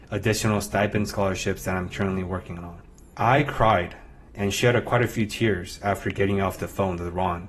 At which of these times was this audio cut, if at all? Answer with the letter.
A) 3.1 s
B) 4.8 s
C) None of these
A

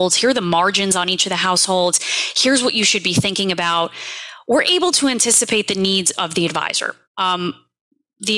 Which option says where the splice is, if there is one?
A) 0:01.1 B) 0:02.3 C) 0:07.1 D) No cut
C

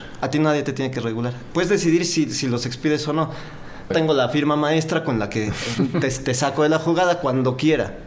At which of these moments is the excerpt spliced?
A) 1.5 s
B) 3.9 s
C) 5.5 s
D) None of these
B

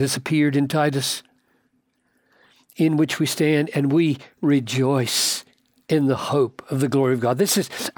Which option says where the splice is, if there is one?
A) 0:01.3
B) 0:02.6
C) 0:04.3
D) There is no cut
D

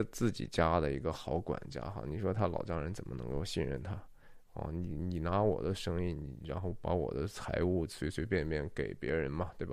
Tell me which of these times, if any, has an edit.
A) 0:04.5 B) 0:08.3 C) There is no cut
C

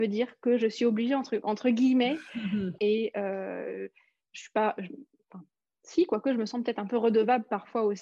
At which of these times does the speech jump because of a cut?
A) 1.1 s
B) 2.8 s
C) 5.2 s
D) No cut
B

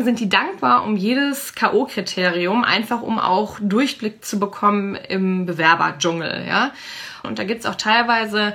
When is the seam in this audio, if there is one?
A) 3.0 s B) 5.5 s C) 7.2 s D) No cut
C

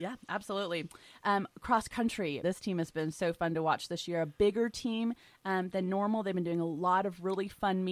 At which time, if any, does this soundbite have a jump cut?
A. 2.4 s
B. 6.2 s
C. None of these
A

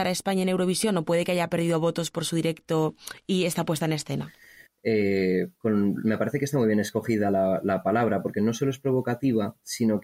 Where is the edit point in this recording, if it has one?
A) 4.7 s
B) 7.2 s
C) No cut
A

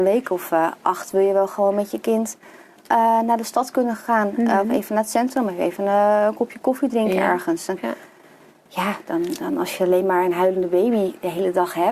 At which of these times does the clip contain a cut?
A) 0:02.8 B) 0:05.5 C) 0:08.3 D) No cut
D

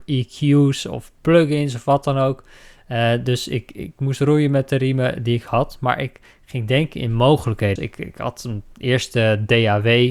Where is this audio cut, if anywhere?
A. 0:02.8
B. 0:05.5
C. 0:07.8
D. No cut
C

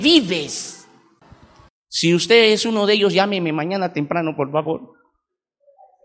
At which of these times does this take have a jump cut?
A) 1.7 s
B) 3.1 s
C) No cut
A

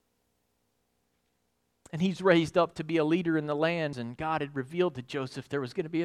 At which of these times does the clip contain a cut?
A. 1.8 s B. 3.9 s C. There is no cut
B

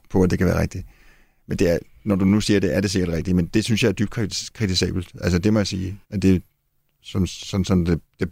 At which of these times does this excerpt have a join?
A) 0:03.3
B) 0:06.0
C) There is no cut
B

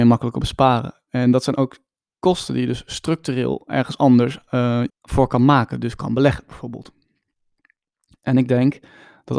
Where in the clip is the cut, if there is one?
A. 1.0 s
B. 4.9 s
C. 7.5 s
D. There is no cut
B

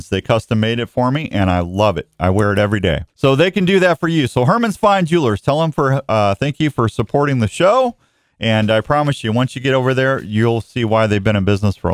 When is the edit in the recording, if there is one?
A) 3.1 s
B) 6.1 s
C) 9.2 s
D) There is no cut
A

